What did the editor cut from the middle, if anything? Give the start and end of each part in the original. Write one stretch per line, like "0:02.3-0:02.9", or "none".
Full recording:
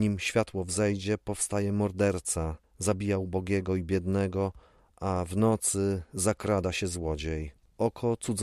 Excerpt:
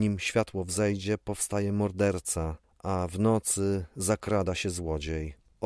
0:02.7-0:04.8